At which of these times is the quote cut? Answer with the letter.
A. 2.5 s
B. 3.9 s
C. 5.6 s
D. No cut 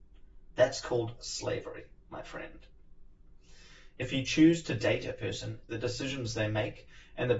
C